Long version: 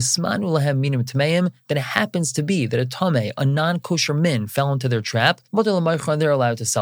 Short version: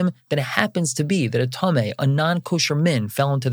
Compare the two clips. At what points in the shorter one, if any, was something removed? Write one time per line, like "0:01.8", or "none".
none